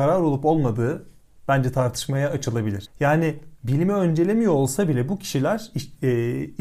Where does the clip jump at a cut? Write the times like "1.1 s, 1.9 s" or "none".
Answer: 2.9 s